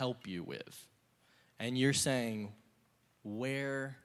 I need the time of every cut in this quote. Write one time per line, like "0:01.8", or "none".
none